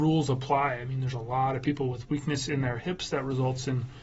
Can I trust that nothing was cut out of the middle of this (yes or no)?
yes